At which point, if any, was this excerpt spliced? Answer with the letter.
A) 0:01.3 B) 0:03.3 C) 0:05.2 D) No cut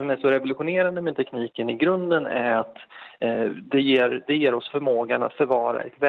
D